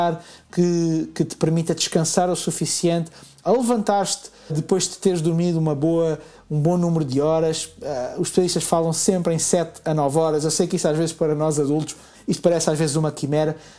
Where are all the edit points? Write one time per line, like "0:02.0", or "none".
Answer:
0:04.5
0:12.1